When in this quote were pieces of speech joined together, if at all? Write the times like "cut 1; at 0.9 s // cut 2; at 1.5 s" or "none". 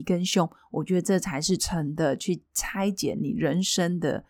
cut 1; at 1.6 s